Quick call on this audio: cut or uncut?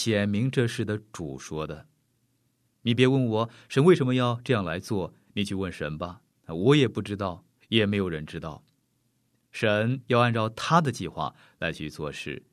uncut